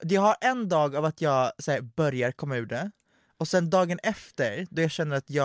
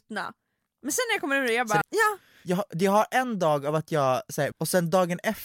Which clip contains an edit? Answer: second; 2 cuts; at 1.8 s, 4.5 s

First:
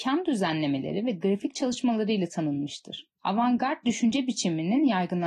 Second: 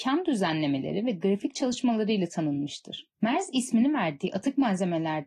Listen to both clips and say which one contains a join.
second; 1 cut; at 3.1 s

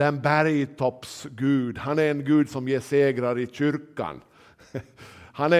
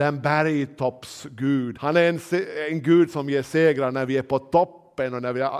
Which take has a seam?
second; 1 cut; at 1.7 s

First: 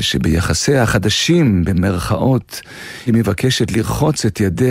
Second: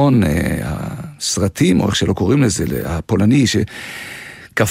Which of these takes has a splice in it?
first; 1 cut; at 3.1 s

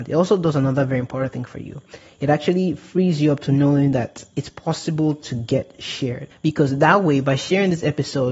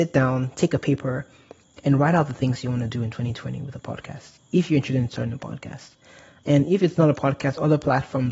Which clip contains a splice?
first; 1 cut; at 6.3 s

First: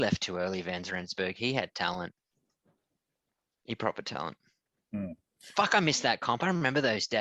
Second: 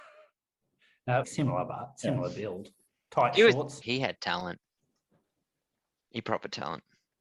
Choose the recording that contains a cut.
second; 2 cuts; at 1.2 s, 3.8 s

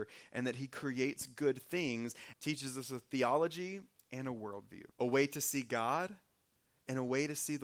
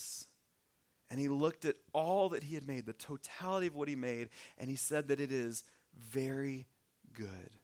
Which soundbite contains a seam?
first; 2 cuts; at 2.3 s, 4.9 s

